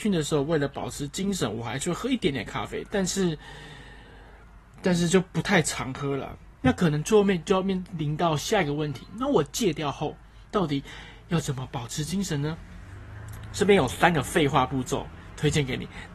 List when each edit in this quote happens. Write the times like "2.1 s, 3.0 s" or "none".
none